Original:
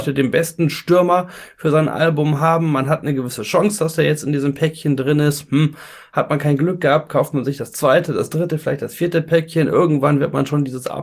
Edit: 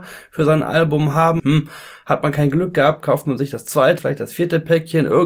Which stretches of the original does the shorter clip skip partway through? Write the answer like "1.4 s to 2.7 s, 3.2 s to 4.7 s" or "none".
2.7 s to 5.5 s, 8.1 s to 8.6 s

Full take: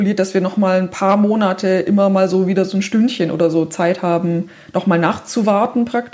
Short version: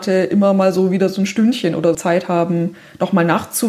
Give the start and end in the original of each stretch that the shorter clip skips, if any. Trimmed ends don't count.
3.5 s to 3.7 s

